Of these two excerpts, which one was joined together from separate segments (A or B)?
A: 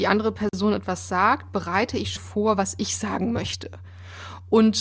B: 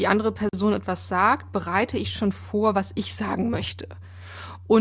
A